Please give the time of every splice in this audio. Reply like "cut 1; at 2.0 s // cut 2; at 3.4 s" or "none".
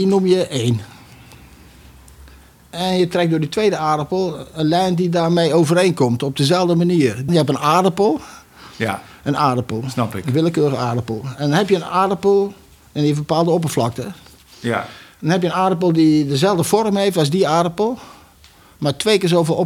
cut 1; at 7.3 s